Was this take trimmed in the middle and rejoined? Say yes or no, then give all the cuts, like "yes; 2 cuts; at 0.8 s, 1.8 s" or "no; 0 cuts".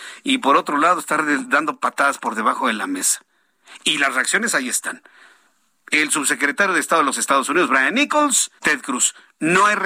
yes; 1 cut; at 8.6 s